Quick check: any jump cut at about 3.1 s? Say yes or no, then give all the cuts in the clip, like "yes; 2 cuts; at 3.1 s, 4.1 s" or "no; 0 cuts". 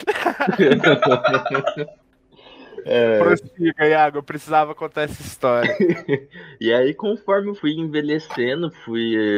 no; 1 cut; at 7.6 s